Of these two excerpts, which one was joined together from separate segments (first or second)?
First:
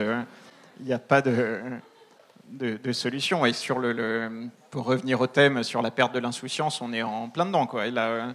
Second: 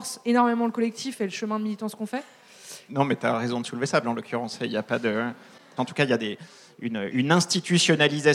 second